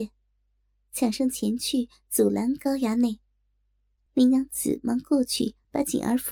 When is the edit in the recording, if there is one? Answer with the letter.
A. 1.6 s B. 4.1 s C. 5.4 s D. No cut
B